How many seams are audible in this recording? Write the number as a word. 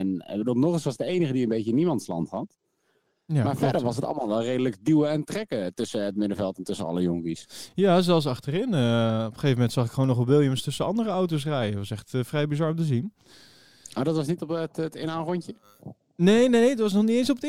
zero